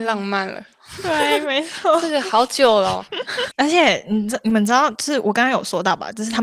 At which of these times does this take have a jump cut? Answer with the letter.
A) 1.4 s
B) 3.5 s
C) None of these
B